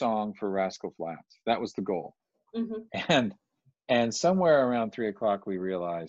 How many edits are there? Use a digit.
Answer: 0